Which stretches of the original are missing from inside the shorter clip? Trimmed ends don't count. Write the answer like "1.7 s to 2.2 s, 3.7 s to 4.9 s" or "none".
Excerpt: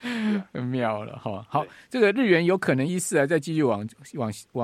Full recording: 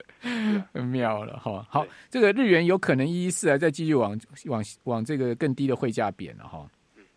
3.1 s to 3.2 s